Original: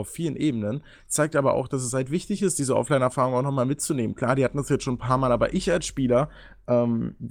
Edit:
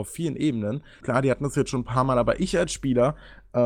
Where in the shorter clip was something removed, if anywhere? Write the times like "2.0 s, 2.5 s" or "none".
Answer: 1.0 s

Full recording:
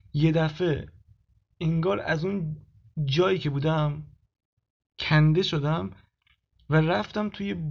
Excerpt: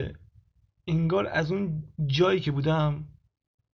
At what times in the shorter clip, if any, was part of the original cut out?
1.9 s

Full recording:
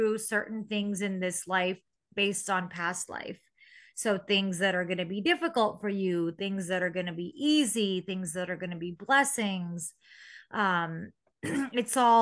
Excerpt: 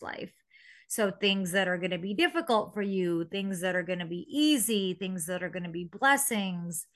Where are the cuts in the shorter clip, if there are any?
none

